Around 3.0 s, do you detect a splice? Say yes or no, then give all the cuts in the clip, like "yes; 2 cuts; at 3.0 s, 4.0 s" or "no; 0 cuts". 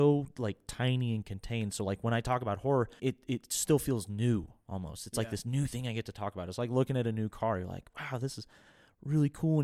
yes; 1 cut; at 3.0 s